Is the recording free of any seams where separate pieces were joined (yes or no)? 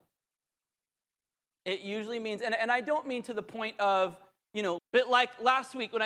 no